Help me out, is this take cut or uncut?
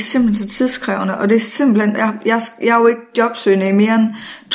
uncut